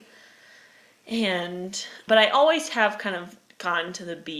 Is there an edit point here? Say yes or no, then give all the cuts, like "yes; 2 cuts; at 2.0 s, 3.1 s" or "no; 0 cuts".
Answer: yes; 1 cut; at 2.1 s